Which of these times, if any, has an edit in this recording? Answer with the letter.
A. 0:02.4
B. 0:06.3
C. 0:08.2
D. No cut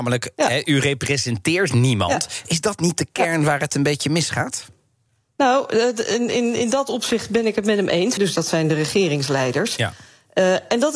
C